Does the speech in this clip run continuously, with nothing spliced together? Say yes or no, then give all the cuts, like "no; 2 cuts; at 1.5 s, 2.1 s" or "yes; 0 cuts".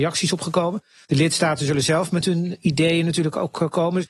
no; 1 cut; at 1.0 s